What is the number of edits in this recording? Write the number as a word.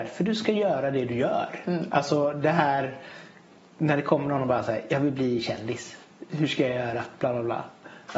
zero